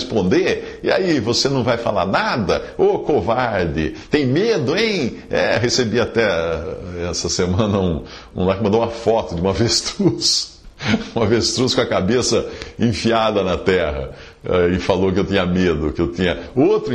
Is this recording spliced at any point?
no; 0 cuts

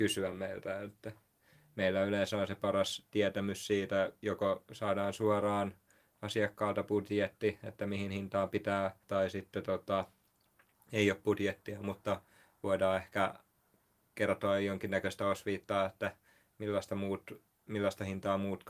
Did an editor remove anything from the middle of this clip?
yes; 1 cut; at 9.0 s

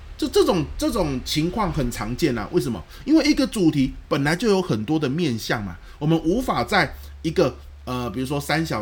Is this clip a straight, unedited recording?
yes; 0 cuts

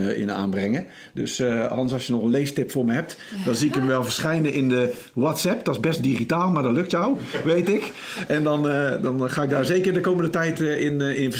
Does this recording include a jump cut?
no; 0 cuts

